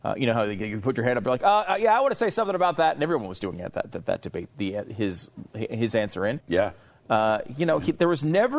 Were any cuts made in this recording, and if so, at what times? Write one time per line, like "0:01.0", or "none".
0:04.5
0:06.4

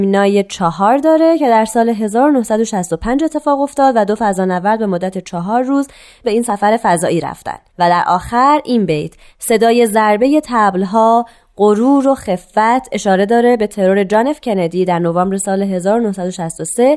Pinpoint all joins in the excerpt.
0:07.7

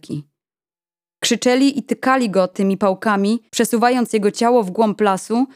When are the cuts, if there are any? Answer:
0:03.5

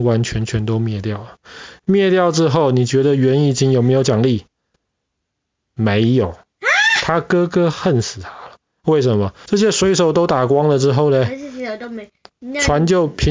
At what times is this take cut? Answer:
0:09.5

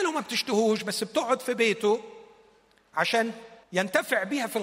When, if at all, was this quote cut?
0:03.6

